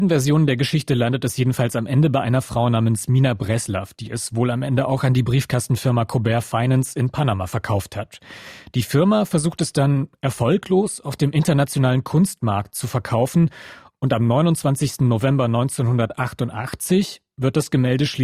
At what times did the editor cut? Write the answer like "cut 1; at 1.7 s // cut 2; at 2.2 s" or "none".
none

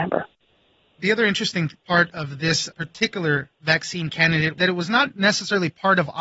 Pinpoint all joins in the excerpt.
none

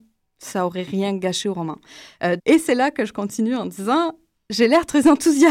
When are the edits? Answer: cut 1; at 2.4 s

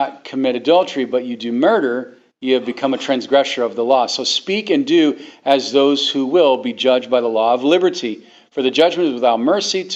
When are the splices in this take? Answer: none

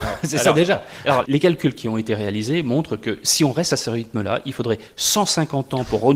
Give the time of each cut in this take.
cut 1; at 1.2 s

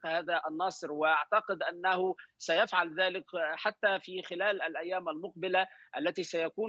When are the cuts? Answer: none

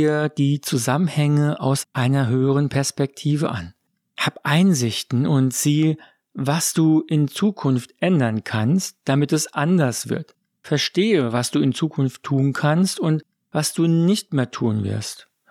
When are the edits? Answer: none

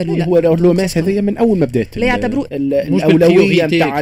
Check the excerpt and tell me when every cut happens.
cut 1; at 2.5 s

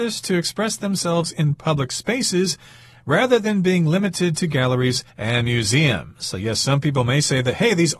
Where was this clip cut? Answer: cut 1; at 5.1 s

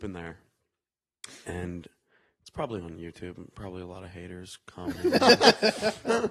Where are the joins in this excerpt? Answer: none

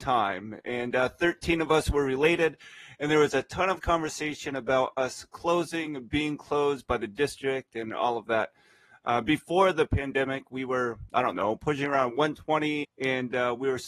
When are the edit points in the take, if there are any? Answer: cut 1; at 12.8 s

